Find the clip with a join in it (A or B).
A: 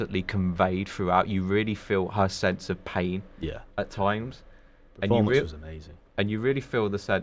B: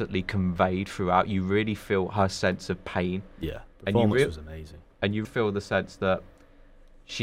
B